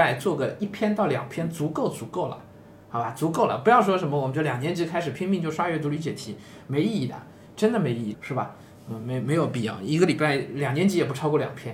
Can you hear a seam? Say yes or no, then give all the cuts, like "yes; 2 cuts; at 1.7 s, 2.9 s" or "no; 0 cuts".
yes; 1 cut; at 8.1 s